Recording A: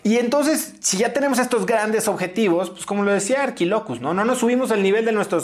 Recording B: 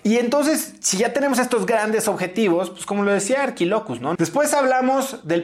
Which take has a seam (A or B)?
B